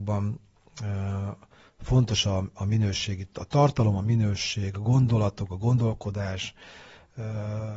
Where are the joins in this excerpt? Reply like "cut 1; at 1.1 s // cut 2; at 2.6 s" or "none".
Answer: none